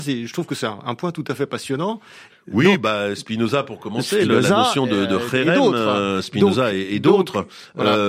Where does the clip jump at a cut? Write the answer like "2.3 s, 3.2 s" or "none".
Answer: 2.3 s